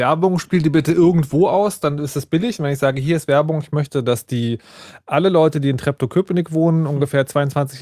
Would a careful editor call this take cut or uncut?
uncut